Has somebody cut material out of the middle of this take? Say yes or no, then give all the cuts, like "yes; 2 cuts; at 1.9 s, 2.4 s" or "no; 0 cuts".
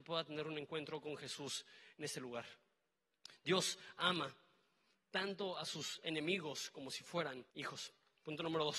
yes; 1 cut; at 7.5 s